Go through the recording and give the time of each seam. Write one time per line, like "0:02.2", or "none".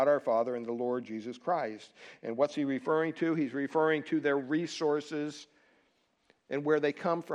none